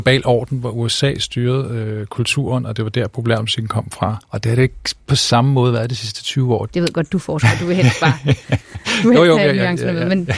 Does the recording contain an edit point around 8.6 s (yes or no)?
no